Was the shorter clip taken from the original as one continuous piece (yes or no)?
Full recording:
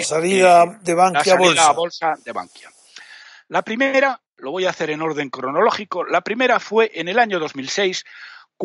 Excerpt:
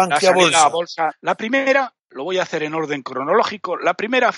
no